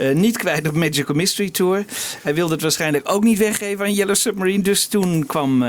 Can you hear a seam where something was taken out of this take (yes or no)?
no